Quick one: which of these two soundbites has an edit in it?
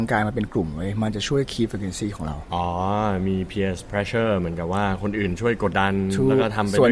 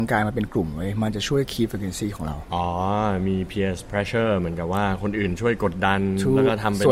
first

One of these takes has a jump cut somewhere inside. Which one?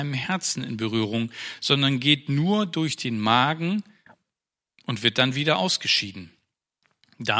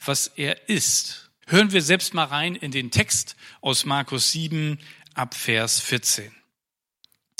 second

